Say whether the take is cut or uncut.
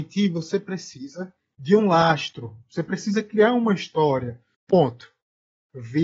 cut